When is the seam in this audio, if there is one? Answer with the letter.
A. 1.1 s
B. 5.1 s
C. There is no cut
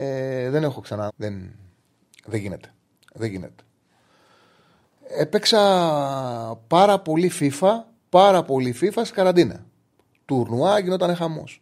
A